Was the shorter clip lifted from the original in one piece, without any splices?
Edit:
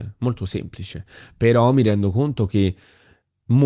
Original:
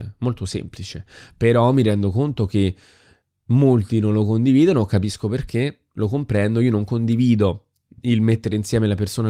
yes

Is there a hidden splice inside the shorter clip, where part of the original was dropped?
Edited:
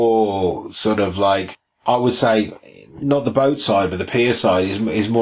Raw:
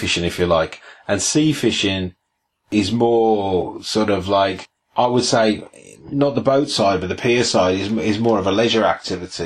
no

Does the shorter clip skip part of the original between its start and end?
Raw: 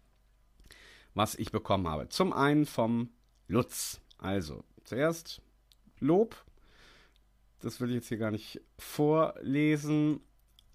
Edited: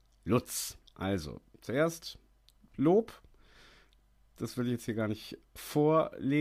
no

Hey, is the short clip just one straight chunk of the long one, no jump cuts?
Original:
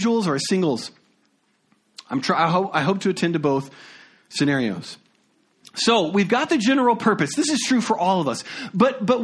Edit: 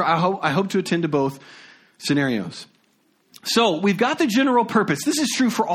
yes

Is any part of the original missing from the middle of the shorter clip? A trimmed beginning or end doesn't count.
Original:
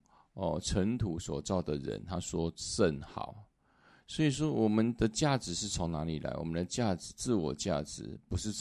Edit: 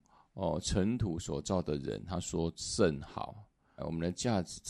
yes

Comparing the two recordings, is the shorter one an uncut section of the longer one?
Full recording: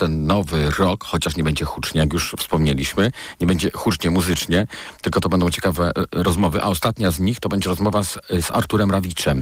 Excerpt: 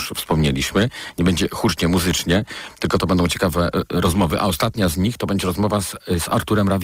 yes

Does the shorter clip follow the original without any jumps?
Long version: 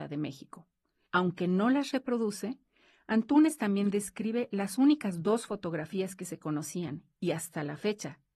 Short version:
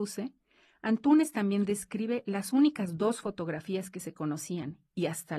yes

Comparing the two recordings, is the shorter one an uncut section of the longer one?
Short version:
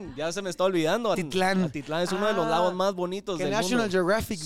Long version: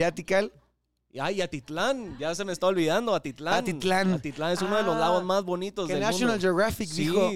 no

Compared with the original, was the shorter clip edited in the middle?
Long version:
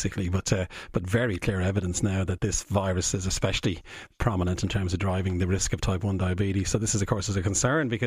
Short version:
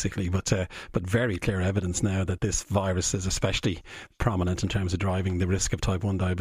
no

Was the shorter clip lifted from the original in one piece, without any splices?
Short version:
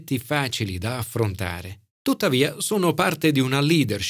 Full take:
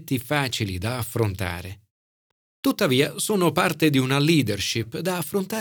no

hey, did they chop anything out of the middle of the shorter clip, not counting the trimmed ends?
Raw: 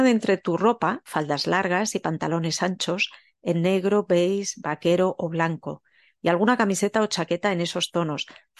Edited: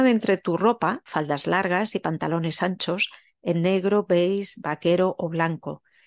no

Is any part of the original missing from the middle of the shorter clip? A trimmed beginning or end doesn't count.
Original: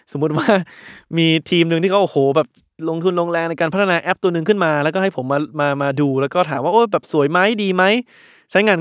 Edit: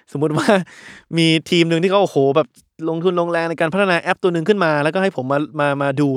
no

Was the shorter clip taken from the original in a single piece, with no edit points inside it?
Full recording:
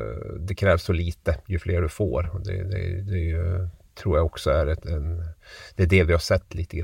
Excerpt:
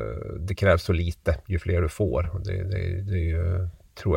yes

